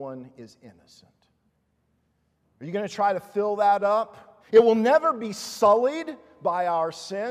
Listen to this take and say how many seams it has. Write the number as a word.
two